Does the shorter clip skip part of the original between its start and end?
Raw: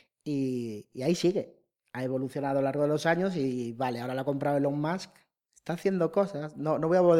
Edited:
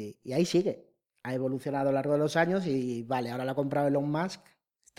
no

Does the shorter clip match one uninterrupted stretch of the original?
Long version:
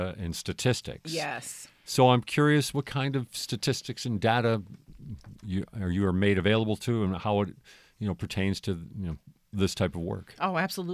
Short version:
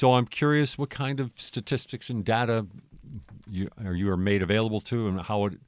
yes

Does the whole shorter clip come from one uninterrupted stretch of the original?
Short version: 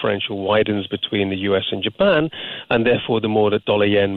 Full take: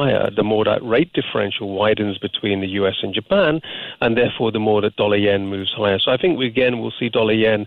yes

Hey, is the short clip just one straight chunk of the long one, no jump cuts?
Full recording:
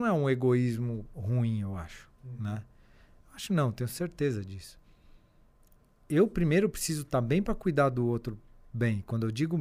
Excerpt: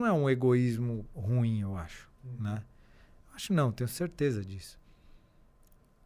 yes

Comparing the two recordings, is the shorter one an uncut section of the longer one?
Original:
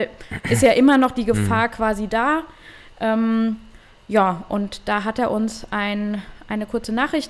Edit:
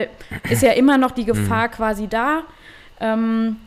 yes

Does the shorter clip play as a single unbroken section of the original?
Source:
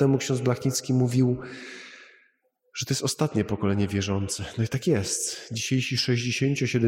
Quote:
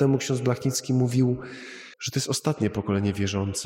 no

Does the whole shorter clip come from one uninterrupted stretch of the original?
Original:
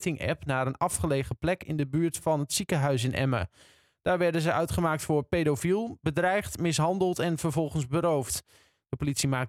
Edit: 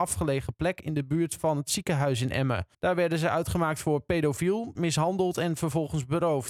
no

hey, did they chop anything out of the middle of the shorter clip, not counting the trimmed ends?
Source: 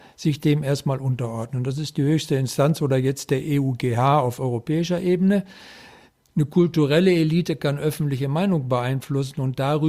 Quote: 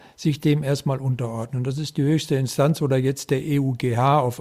no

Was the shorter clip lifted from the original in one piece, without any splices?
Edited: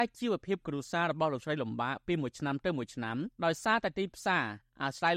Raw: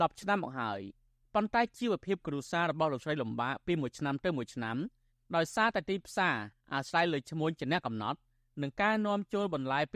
no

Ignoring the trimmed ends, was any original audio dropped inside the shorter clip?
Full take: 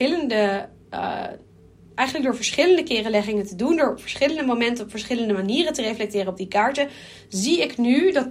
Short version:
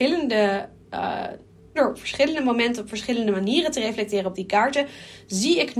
yes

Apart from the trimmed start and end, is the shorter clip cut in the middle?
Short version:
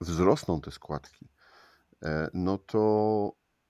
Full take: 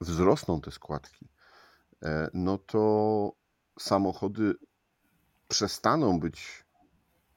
no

